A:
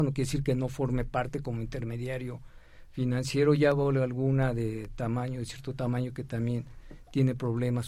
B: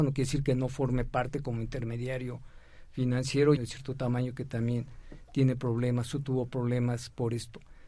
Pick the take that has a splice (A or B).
B